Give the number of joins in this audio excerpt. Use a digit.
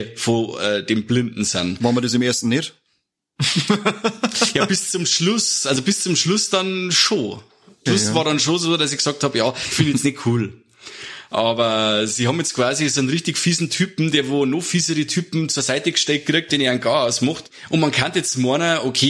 1